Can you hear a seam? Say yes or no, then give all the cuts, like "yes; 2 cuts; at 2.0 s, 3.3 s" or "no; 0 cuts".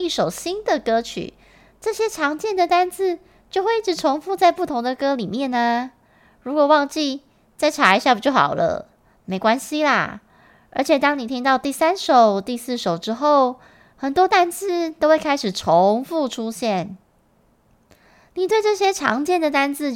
no; 0 cuts